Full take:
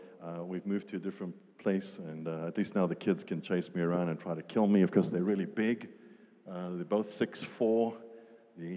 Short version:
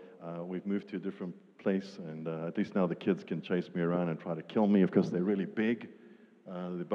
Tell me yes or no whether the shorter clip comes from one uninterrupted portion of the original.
yes